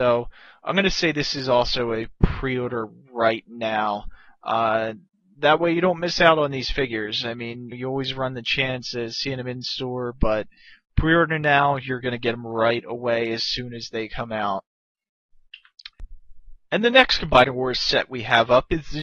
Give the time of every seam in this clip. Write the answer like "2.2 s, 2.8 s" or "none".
7.7 s

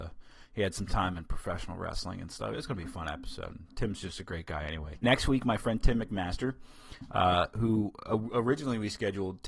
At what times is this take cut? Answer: 4.9 s

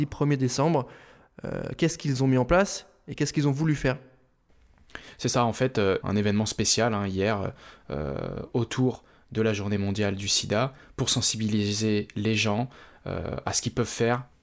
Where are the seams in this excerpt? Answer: 6.0 s

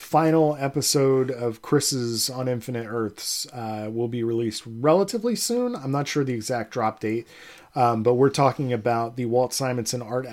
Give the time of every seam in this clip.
none

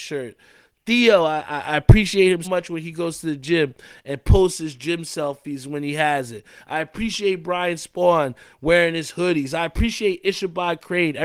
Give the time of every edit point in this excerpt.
2.4 s

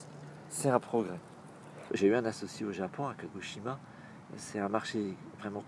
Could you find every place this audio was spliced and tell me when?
1.9 s

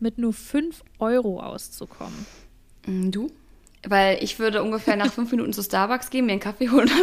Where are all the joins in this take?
none

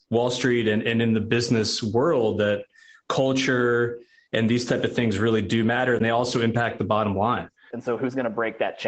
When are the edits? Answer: 7.7 s

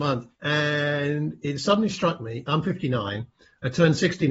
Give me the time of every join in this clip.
none

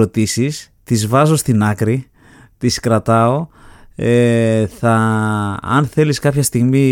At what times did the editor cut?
none

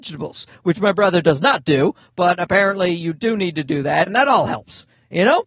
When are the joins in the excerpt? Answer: 4.1 s

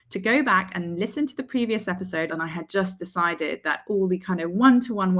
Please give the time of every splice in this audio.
2.3 s

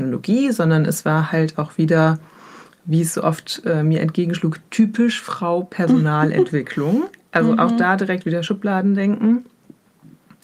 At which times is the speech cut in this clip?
none

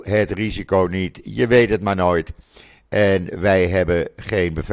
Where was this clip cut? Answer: none

